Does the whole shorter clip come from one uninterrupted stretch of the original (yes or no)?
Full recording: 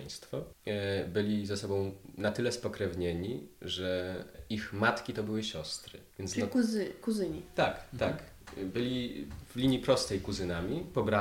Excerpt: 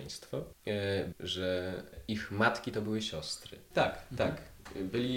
no